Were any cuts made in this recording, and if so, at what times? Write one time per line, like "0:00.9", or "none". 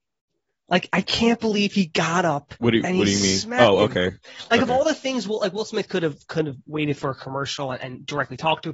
none